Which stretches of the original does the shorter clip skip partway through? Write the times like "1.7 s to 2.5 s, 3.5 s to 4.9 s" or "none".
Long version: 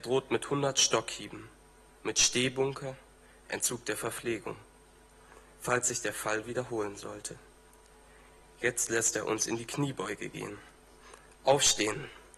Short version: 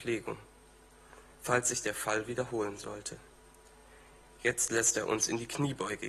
none